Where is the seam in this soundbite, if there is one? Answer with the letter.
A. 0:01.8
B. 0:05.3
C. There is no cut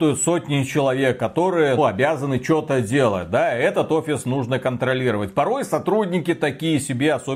A